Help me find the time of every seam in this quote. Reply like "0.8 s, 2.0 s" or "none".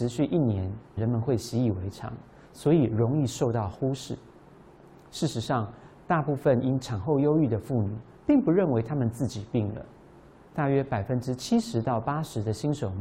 1.0 s